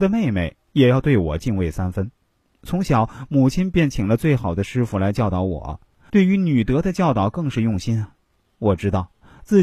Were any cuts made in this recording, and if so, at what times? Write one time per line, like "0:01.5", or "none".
0:02.5
0:06.1